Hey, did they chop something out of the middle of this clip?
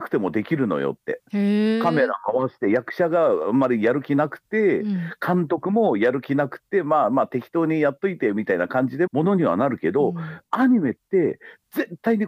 yes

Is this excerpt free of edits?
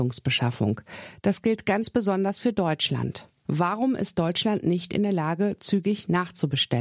yes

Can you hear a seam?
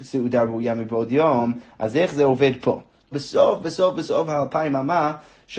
yes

